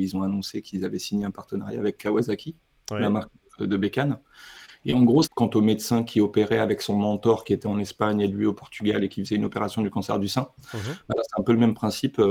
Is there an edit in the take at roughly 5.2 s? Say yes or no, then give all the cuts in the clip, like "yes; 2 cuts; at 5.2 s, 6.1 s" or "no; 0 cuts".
yes; 1 cut; at 5.2 s